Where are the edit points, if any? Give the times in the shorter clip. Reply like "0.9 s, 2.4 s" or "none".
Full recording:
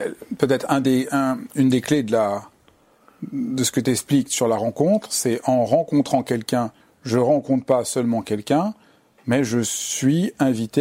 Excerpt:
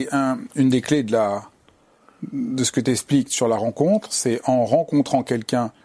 none